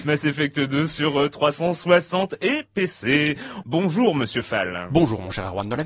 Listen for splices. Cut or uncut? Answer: cut